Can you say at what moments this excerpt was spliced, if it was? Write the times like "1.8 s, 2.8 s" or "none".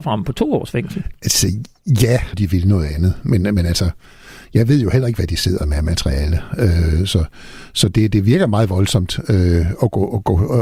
2.3 s